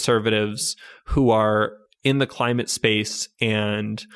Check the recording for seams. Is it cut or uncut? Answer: uncut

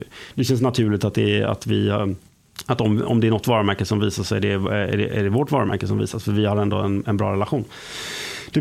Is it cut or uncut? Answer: uncut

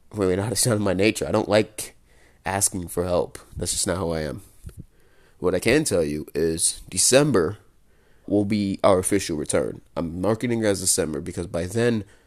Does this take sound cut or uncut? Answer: cut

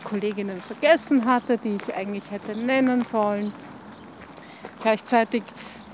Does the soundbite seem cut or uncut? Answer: cut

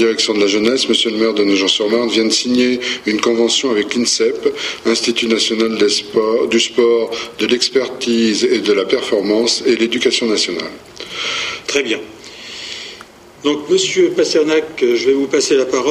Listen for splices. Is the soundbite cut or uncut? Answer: cut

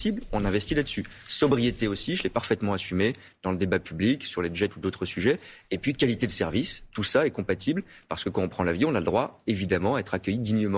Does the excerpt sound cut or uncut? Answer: uncut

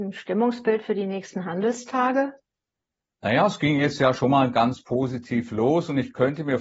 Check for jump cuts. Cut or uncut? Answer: uncut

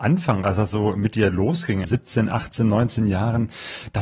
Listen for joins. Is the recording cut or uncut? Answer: cut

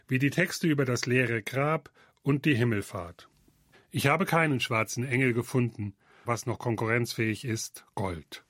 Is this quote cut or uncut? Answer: cut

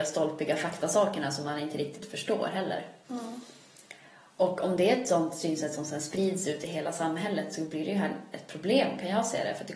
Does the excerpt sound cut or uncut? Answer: uncut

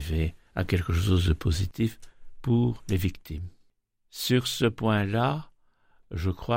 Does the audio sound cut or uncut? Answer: uncut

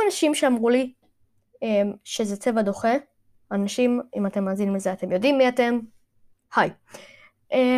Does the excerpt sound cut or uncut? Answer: uncut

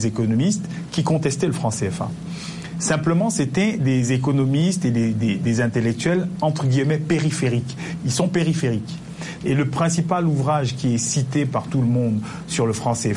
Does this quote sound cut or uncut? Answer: cut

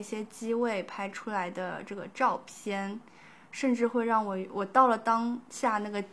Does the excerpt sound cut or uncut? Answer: uncut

